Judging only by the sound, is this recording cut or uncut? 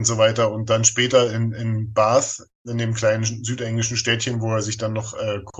uncut